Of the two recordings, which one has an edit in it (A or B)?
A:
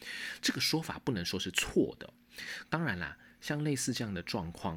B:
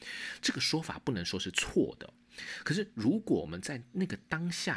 A